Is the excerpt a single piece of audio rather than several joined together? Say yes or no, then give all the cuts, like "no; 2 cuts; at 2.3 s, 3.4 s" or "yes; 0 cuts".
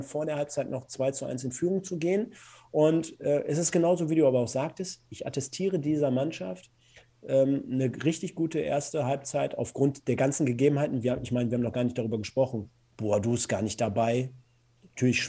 yes; 0 cuts